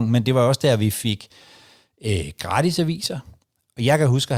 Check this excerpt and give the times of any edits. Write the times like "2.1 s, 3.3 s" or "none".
none